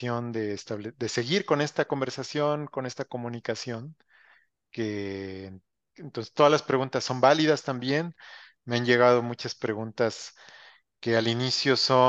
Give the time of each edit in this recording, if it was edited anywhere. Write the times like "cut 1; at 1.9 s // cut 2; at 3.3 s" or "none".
none